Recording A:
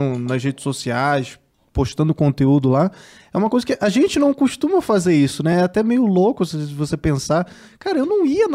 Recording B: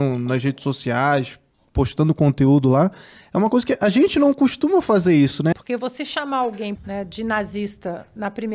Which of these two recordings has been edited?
B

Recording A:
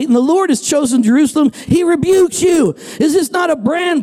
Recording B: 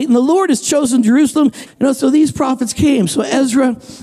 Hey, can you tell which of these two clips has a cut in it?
B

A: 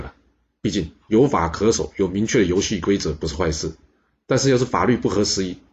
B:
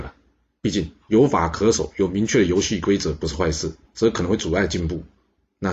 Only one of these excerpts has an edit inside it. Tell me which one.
B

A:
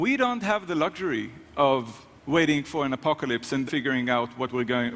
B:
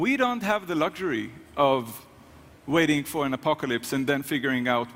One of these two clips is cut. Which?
A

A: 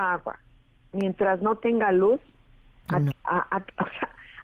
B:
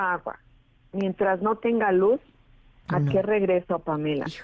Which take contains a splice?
A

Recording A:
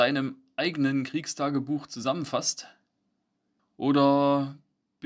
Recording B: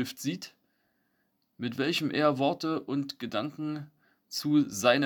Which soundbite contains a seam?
A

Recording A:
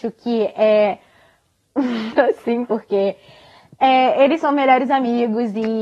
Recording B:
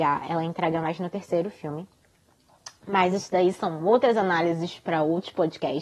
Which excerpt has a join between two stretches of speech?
A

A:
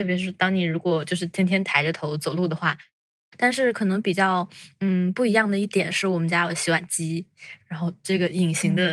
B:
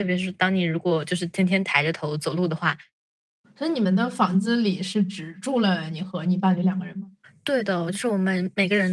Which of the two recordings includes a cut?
A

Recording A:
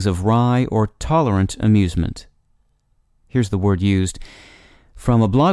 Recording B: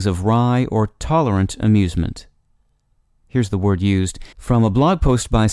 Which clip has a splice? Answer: B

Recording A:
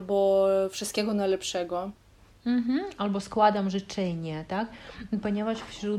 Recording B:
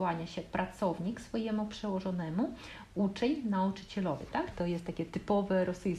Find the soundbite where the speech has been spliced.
B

